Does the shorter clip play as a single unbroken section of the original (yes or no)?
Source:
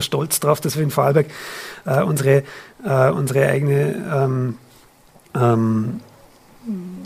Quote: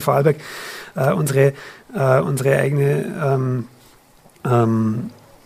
yes